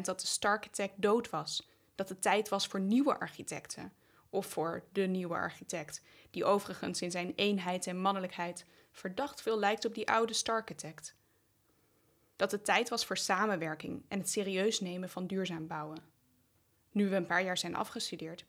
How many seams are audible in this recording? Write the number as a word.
zero